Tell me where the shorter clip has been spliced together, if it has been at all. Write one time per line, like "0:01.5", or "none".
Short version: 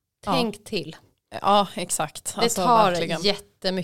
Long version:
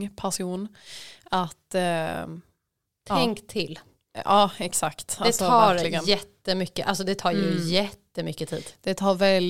none